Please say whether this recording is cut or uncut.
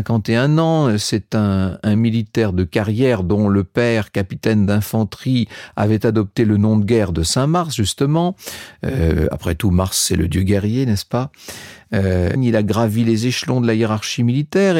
cut